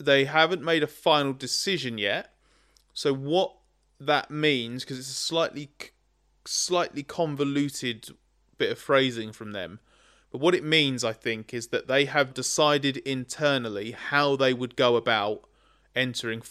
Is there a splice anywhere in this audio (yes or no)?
yes